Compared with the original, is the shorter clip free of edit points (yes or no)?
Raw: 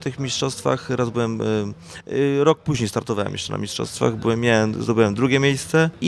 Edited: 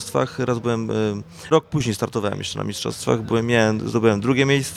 no